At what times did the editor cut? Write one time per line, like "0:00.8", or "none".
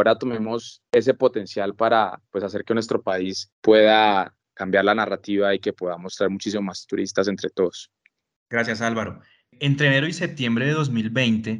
none